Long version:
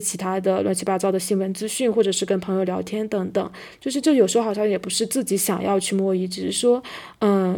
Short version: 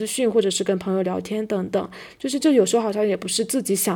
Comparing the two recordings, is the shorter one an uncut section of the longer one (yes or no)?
yes